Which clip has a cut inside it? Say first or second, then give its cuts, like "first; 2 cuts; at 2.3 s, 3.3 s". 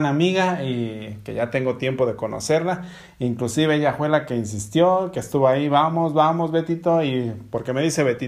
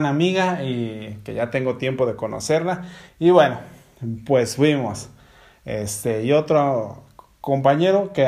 second; 1 cut; at 3.1 s